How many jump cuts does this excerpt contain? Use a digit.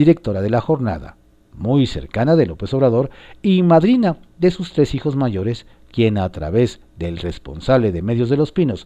0